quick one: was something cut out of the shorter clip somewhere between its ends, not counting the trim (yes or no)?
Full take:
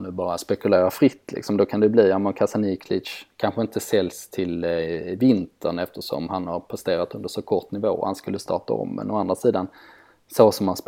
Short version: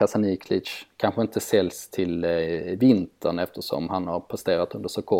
no